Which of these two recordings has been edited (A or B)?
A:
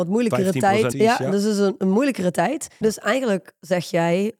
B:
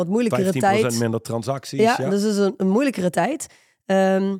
A